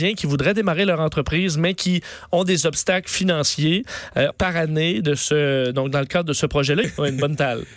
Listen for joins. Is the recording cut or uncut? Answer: cut